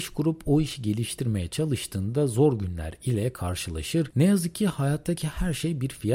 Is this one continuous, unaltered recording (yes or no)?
yes